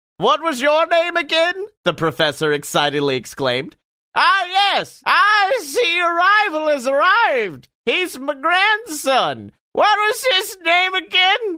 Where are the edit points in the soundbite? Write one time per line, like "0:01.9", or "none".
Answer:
0:05.0
0:09.6